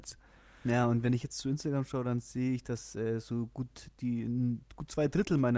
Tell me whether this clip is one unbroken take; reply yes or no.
yes